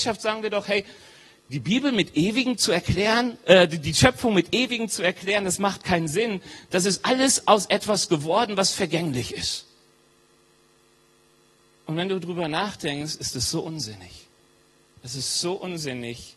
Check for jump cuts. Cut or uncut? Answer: uncut